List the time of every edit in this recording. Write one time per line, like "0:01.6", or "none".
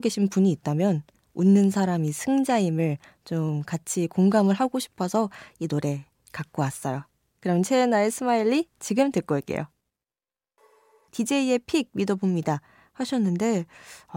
0:11.1